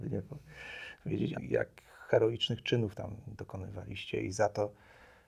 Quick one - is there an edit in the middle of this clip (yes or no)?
yes